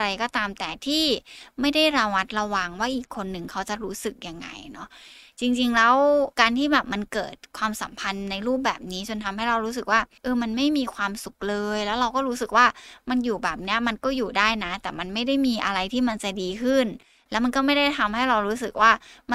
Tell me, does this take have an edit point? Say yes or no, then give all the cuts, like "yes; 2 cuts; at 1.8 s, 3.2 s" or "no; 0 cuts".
yes; 1 cut; at 6.3 s